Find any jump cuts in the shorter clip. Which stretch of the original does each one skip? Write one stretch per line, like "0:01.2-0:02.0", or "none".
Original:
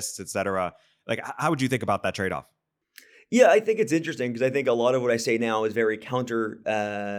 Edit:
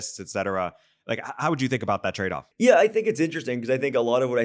0:02.5-0:03.2